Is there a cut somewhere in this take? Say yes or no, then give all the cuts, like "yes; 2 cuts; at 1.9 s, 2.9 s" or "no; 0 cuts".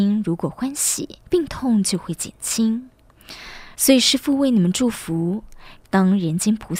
yes; 3 cuts; at 1.2 s, 3.7 s, 5.8 s